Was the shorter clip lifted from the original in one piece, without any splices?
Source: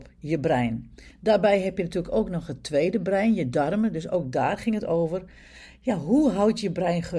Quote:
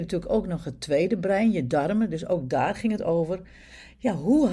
yes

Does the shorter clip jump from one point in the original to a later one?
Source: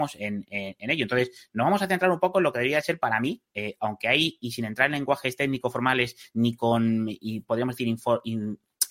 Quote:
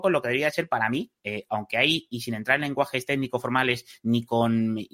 no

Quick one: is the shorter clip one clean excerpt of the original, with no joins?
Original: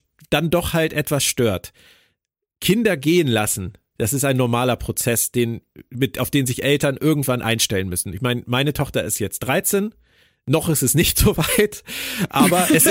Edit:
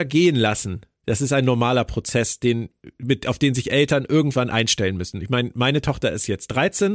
yes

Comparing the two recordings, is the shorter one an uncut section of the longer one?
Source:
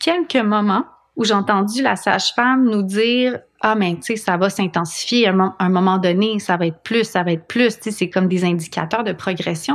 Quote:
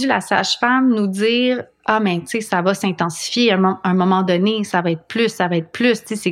yes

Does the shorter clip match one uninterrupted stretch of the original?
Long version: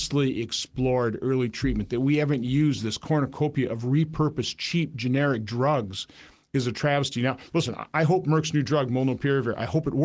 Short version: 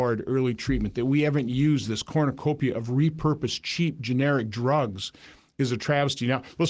yes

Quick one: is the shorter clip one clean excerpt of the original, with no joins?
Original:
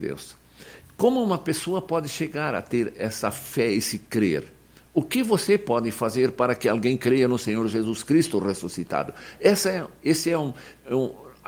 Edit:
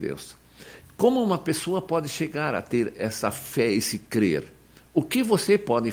yes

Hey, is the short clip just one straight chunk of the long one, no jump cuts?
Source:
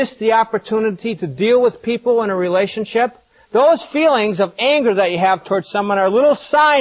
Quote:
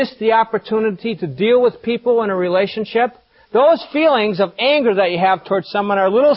yes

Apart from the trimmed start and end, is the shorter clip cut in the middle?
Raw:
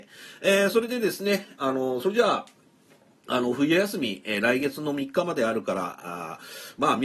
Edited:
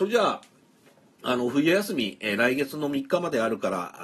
no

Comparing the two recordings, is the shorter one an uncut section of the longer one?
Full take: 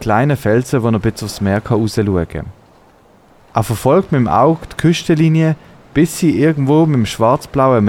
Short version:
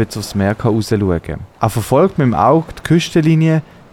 no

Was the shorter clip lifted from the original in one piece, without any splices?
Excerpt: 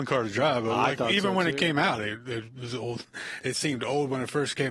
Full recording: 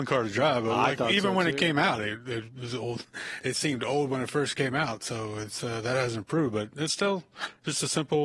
yes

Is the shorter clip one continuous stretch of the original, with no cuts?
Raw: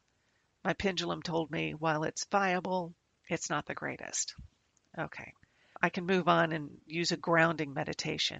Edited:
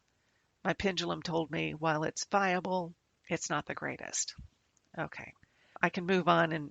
yes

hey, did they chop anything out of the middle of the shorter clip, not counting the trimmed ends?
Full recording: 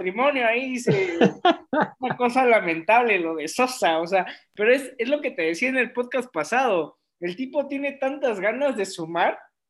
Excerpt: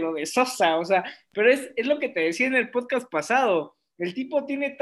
no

